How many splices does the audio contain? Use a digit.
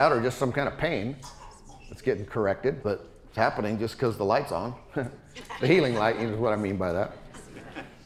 1